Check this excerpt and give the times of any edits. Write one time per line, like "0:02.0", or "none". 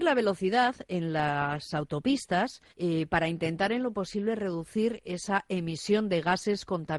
0:02.7